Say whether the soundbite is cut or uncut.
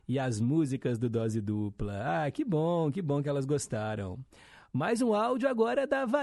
uncut